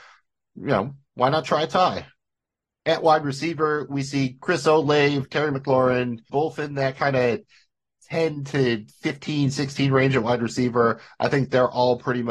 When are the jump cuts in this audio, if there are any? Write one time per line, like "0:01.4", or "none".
0:06.3